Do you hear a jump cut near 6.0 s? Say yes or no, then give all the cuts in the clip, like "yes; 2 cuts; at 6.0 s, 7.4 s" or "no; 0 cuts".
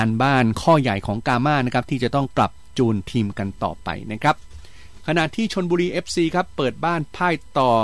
no; 1 cut; at 2.3 s